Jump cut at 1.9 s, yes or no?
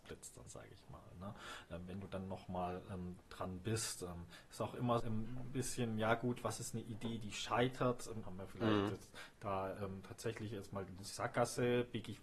no